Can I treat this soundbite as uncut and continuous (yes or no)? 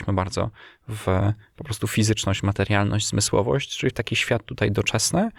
yes